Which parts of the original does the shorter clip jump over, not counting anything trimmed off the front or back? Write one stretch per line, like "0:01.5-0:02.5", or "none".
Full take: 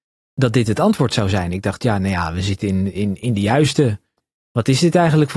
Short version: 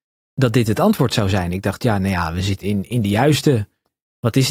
0:02.6-0:02.9